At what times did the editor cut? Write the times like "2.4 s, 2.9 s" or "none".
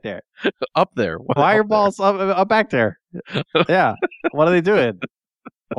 1.4 s

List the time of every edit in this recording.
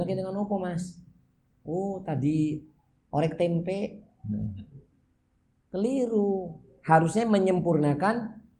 none

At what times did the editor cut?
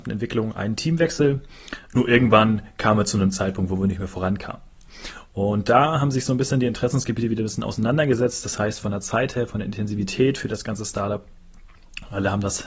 1.9 s

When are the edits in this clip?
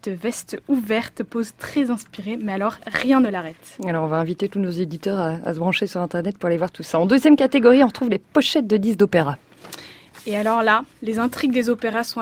none

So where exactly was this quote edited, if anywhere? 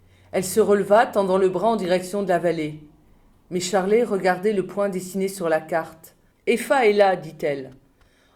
6.3 s

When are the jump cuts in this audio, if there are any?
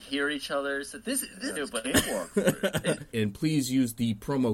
1.6 s, 3.1 s

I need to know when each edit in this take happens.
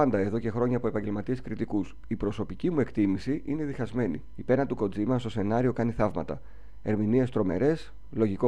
4.3 s

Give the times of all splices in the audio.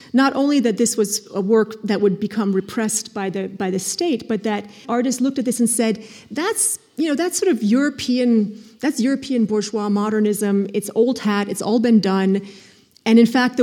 4.8 s

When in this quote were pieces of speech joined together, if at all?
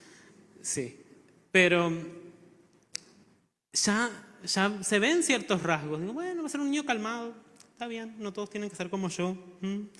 none

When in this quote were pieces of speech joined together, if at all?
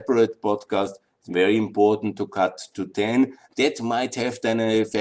none

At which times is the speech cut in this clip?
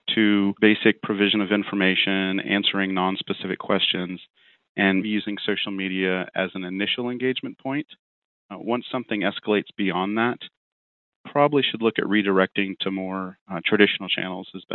5.0 s

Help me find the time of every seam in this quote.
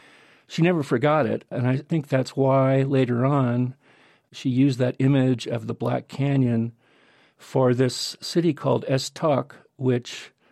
none

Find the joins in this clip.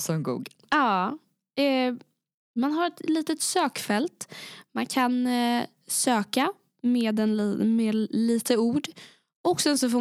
none

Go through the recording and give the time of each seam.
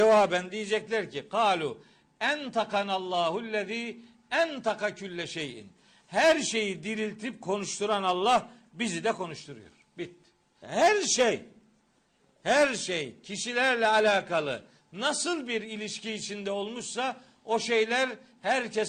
10.6 s

